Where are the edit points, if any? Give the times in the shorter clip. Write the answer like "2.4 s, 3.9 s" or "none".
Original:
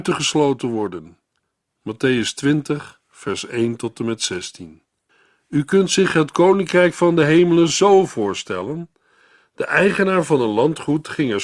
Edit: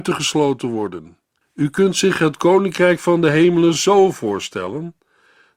1.4 s